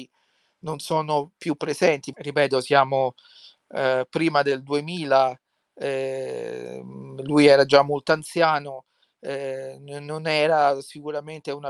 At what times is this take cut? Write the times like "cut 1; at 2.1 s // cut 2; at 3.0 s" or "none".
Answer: cut 1; at 2.1 s